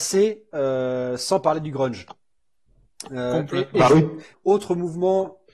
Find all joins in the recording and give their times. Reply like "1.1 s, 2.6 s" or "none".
4.3 s